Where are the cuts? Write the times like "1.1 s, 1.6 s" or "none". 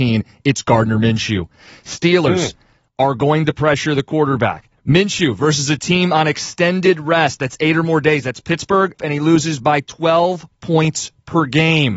9.0 s